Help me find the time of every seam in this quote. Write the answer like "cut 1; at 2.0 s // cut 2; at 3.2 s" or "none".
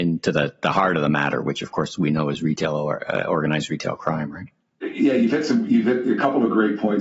none